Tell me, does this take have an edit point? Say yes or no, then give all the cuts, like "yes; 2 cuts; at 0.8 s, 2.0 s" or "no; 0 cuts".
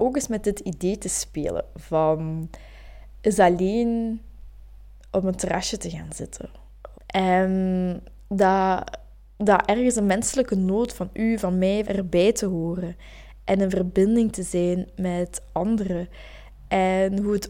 yes; 2 cuts; at 6.9 s, 11.8 s